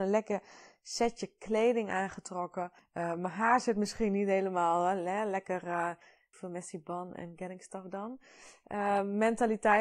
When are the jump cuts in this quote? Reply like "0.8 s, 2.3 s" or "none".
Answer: none